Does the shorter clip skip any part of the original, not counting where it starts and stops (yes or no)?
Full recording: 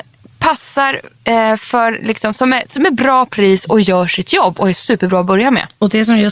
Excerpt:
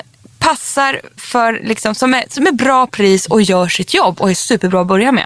yes